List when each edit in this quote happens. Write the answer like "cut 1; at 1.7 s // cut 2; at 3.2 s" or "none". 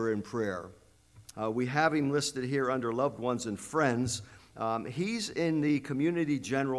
cut 1; at 1.3 s

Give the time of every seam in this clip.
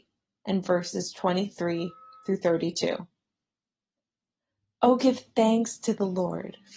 none

